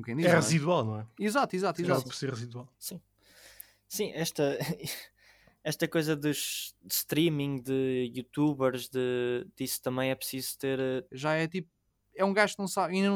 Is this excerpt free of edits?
no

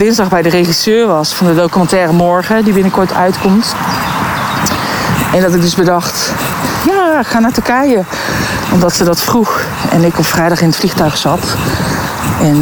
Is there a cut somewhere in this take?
no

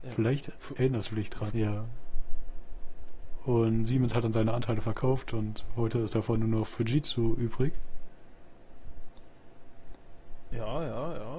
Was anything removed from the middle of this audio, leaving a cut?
yes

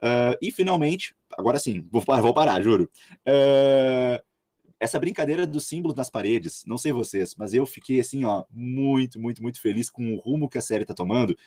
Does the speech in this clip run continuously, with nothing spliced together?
yes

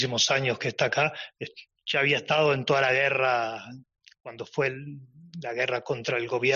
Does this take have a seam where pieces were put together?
yes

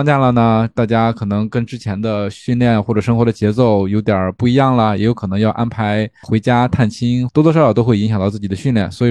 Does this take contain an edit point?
yes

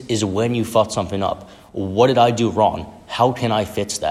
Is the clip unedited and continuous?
yes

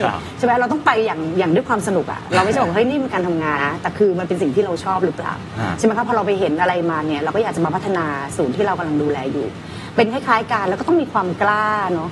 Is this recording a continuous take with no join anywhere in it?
no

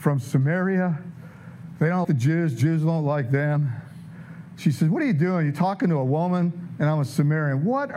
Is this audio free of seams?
no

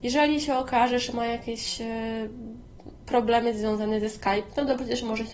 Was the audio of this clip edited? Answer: no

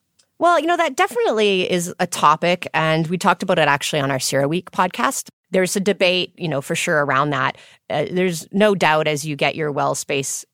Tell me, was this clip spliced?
no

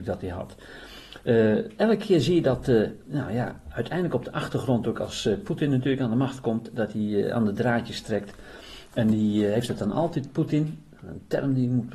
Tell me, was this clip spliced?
no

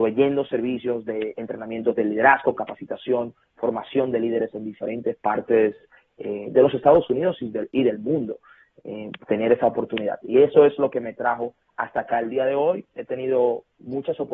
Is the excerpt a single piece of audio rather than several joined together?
yes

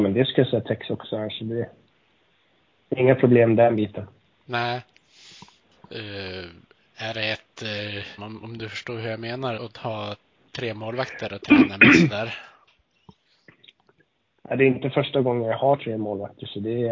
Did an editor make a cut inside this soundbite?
yes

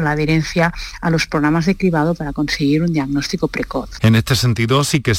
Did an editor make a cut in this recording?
yes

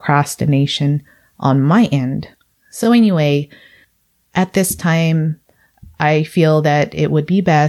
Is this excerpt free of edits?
yes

